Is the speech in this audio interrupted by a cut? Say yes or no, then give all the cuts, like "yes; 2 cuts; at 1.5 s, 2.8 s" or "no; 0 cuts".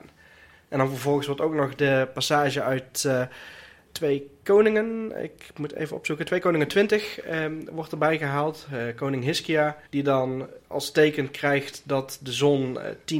yes; 2 cuts; at 3.9 s, 9.9 s